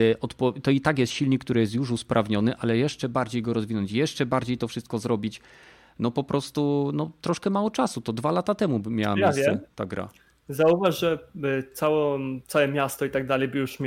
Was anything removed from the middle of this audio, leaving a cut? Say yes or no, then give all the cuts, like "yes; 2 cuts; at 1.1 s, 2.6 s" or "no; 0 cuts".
no; 0 cuts